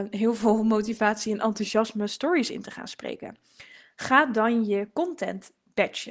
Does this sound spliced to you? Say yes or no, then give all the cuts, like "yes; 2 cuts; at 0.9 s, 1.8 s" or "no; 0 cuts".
no; 0 cuts